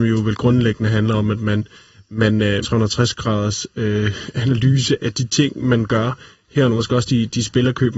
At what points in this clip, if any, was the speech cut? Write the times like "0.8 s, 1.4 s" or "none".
2.6 s, 5.0 s